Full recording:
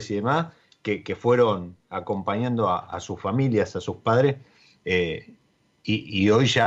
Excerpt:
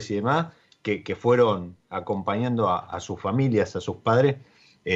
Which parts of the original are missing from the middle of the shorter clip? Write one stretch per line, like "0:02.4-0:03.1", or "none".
none

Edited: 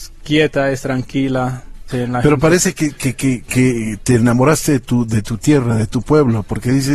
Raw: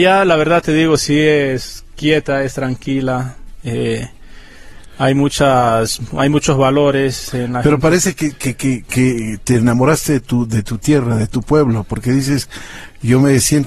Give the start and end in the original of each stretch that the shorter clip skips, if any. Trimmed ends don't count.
0:03.6-0:07.3

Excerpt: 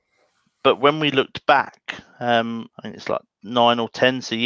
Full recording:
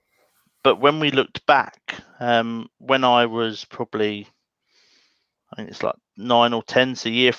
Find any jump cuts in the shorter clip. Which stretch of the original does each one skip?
0:02.7-0:05.4

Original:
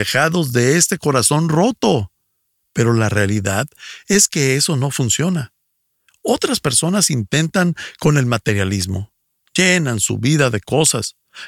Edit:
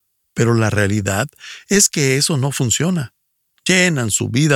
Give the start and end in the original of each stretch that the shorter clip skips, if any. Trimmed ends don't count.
0:05.9-0:09.4

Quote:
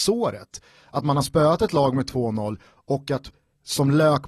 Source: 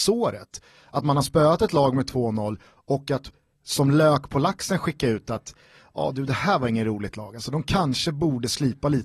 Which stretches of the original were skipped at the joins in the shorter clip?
none

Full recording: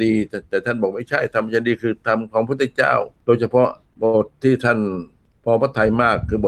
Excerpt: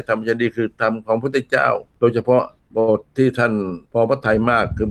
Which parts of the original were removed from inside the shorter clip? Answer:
0:05.1-0:05.4

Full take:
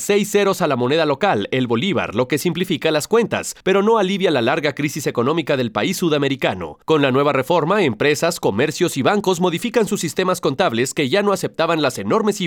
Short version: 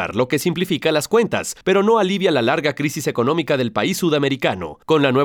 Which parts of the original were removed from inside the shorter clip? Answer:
none

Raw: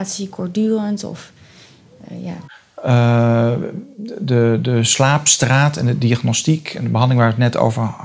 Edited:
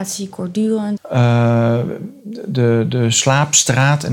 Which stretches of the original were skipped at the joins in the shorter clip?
0:01.0-0:02.7

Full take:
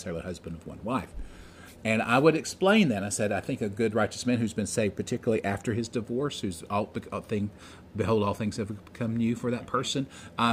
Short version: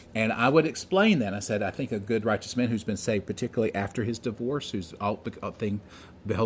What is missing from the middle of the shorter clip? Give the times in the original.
none

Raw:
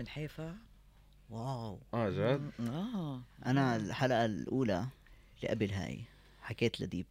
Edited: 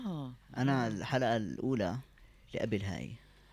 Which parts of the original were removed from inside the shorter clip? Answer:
none

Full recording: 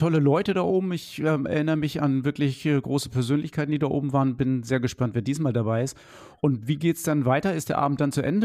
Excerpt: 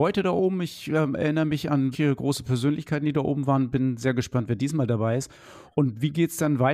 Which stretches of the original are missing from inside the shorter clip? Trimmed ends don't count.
0:02.2-0:02.6

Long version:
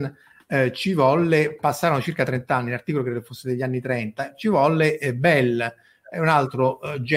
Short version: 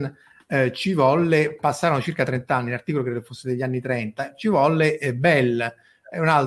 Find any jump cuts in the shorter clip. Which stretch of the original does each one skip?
none

